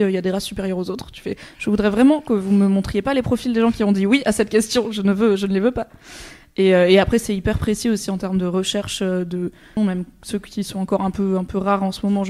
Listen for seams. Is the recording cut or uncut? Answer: cut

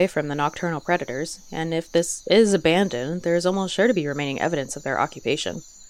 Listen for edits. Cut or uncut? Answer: uncut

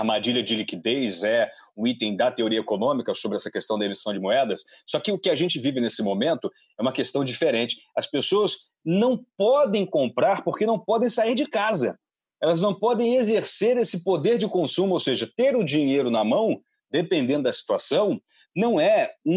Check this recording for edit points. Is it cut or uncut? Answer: uncut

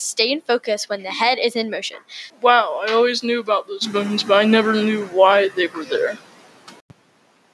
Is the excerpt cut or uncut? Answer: cut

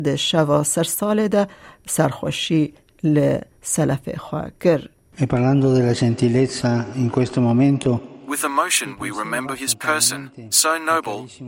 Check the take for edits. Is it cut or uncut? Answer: uncut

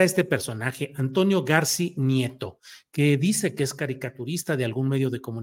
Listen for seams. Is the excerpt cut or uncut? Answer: uncut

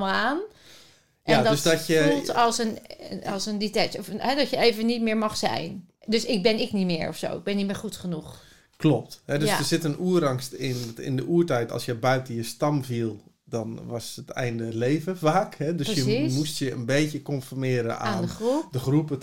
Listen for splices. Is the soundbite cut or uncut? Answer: uncut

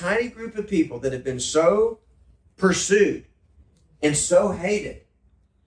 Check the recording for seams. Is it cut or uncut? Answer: uncut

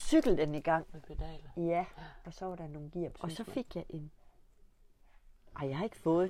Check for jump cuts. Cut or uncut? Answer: cut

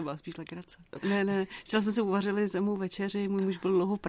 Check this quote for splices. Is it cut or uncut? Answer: cut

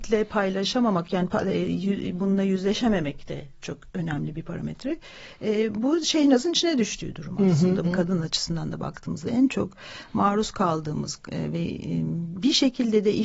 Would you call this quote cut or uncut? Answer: cut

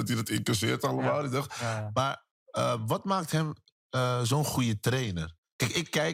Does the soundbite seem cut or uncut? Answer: uncut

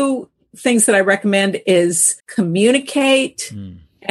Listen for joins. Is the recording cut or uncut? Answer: cut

